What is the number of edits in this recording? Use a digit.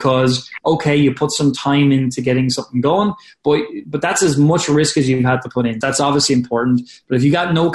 1